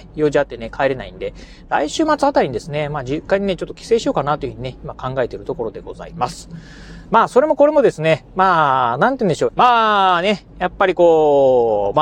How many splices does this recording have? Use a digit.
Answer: 2